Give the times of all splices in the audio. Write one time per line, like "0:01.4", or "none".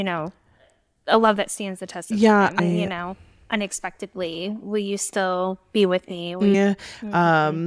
0:02.6
0:06.5